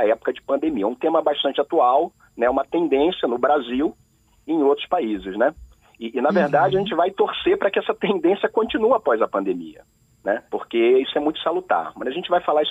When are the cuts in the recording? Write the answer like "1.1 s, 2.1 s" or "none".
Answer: 10.5 s